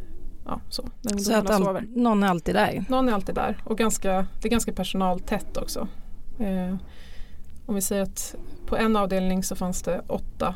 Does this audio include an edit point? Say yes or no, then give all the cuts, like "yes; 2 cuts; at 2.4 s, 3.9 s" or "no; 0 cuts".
no; 0 cuts